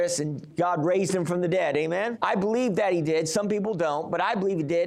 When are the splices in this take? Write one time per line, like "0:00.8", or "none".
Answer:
0:02.1